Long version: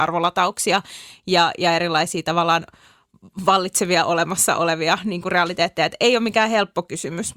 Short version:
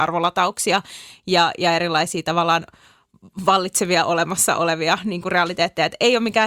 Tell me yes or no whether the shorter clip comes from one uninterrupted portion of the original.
yes